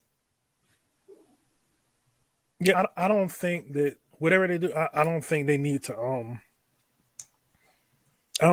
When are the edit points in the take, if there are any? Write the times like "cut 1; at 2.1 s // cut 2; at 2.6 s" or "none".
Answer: cut 1; at 2.7 s